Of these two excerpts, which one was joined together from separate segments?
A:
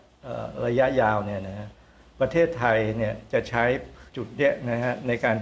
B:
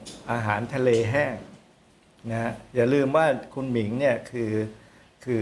A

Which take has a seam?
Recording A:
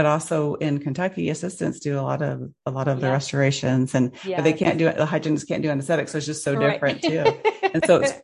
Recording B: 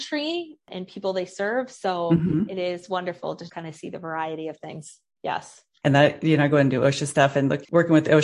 B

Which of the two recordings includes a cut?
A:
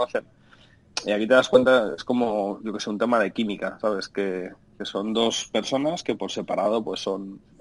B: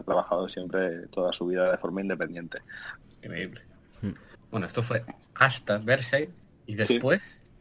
B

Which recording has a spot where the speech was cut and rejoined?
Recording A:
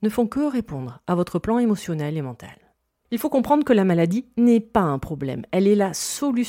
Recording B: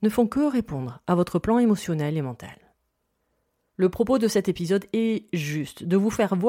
A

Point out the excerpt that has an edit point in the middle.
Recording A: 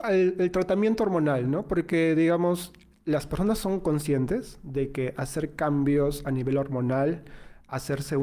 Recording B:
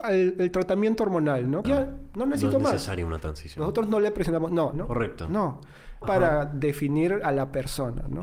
B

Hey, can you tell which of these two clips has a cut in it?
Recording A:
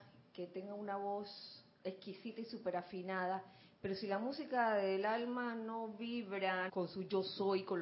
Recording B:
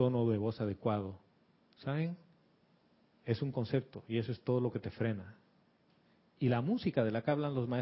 A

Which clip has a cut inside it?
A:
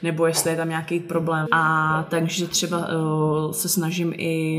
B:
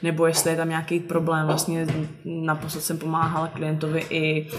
A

